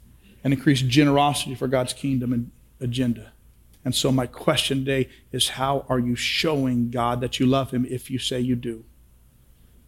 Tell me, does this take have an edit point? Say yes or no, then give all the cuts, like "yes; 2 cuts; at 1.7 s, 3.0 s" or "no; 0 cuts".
yes; 1 cut; at 3.7 s